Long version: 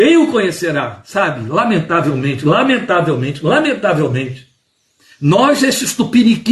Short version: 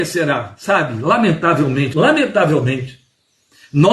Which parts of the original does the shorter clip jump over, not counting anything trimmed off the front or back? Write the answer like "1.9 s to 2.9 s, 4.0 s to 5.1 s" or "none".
2.4 s to 3.4 s